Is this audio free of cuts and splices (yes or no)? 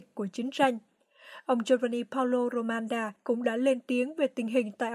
no